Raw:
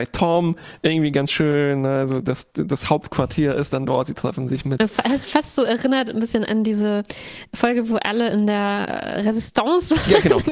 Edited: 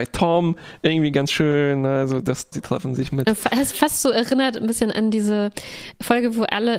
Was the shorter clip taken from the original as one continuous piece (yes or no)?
no